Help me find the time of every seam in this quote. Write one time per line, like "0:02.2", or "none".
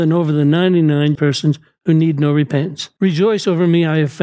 0:01.2
0:03.0